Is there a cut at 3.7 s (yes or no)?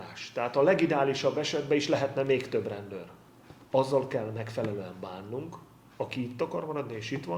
yes